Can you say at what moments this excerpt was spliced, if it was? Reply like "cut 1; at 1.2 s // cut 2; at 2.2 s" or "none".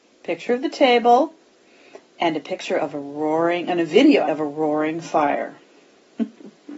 cut 1; at 2.0 s // cut 2; at 4.3 s

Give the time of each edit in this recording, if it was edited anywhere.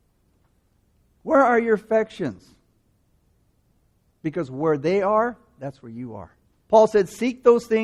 cut 1; at 6.5 s

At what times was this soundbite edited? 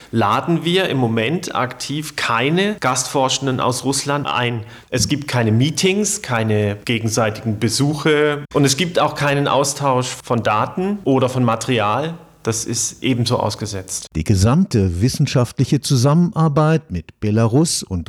cut 1; at 4.8 s

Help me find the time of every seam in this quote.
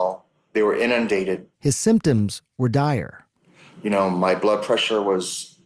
cut 1; at 1.5 s

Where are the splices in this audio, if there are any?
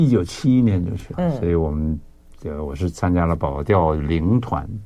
cut 1; at 1.1 s

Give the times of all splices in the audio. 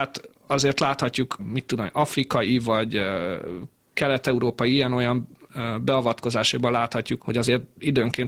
cut 1; at 1.4 s // cut 2; at 7.2 s

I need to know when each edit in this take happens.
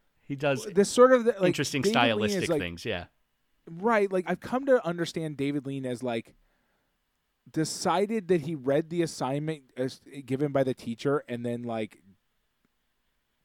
cut 1; at 4.2 s

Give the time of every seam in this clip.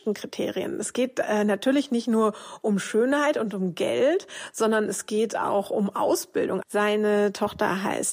cut 1; at 6.6 s

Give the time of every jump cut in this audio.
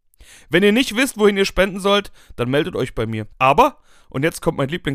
cut 1; at 3.3 s

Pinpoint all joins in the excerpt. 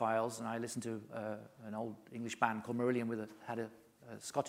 none

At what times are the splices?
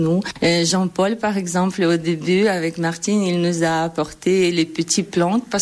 none

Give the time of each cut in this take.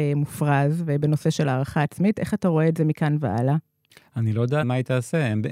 cut 1; at 4.6 s

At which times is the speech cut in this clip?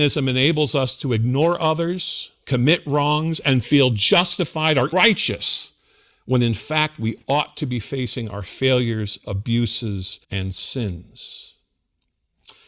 cut 1; at 4.9 s // cut 2; at 10.2 s

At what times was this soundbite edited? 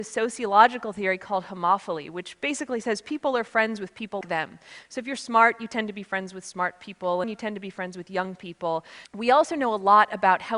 cut 1; at 4.2 s // cut 2; at 7.2 s // cut 3; at 9.0 s

